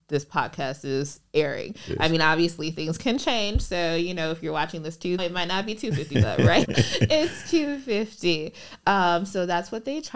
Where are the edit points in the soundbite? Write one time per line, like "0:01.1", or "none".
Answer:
0:05.2
0:06.7